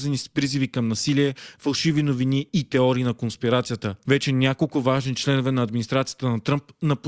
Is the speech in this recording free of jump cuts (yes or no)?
no